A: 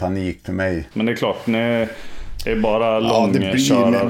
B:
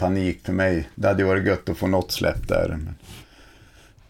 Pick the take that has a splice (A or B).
A